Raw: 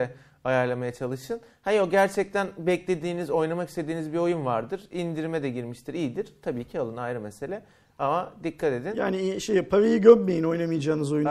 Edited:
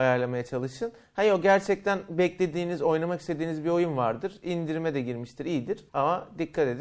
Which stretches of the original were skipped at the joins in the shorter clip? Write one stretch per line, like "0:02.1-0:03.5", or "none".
0:06.4-0:07.9